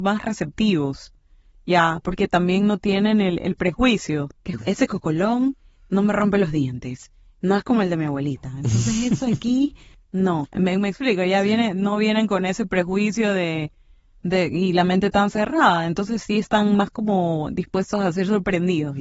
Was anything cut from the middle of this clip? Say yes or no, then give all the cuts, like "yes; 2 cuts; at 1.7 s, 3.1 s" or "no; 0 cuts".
yes; 1 cut; at 4.6 s